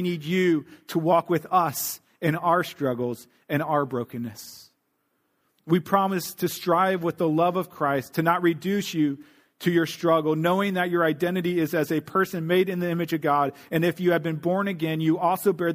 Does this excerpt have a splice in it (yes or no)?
no